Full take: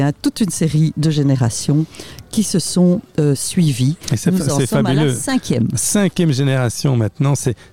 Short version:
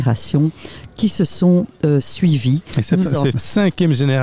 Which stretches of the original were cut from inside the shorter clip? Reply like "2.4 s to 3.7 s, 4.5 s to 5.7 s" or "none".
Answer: 4.7 s to 5.7 s